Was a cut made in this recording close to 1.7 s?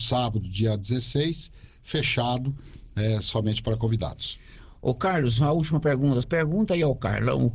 no; 1 cut; at 6.2 s

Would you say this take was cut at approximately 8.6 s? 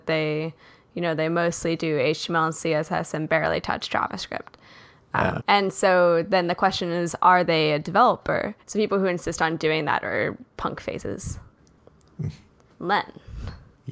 yes; 2 cuts; at 5.4 s, 8.6 s

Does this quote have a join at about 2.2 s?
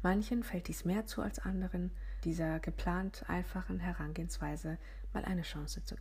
yes; 1 cut; at 2.2 s

